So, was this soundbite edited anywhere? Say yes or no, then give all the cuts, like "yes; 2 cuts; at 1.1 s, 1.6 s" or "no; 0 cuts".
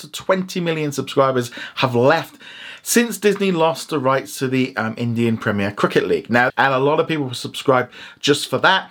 yes; 1 cut; at 6.5 s